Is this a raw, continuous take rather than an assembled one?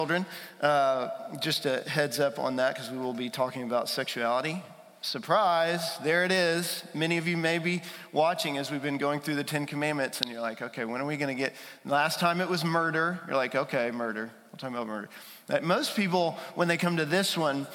yes; 0 cuts

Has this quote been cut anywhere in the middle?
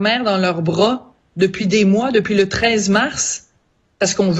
no; 0 cuts

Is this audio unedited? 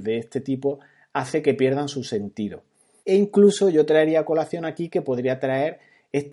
no; 1 cut; at 3.0 s

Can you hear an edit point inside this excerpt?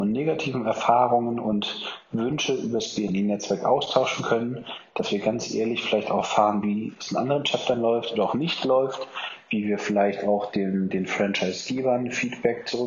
no; 0 cuts

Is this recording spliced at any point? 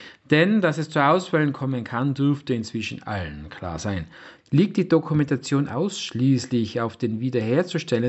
yes; 1 cut; at 4.4 s

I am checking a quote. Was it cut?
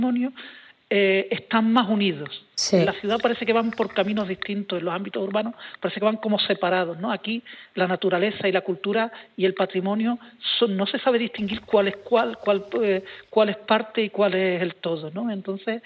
no; 0 cuts

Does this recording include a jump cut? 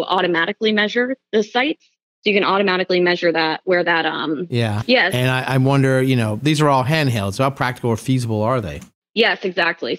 yes; 1 cut; at 4.8 s

